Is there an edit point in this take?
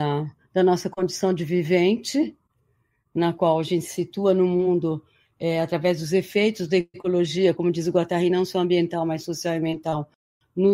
no; 0 cuts

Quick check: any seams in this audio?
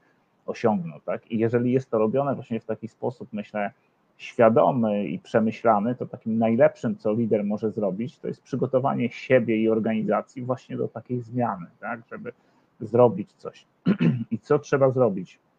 no; 0 cuts

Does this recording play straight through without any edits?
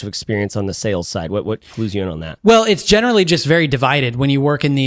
yes; 0 cuts

